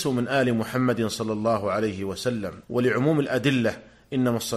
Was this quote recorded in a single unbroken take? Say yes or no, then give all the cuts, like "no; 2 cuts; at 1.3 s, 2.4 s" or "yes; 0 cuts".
no; 1 cut; at 2.6 s